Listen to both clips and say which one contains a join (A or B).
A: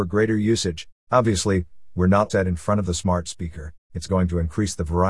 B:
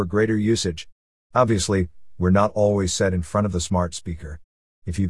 A